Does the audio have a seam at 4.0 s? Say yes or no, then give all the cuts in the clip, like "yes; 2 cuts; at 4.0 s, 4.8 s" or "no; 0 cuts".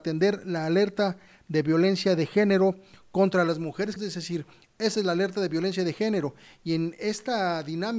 yes; 1 cut; at 4.0 s